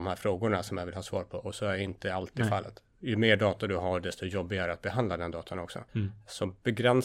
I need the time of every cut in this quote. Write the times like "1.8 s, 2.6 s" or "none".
5.9 s